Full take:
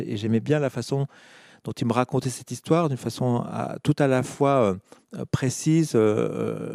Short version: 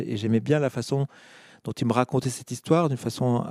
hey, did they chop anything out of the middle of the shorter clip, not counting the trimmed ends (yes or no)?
no